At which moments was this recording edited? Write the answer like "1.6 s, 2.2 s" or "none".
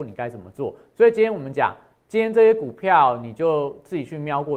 none

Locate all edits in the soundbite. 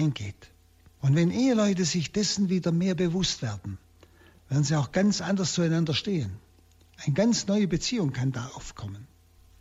1.0 s

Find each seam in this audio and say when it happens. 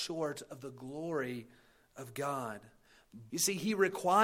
3.3 s

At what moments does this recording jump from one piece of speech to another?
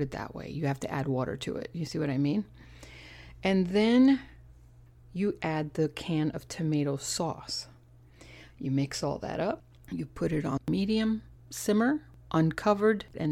none

